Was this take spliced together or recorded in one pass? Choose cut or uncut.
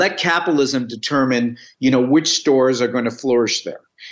uncut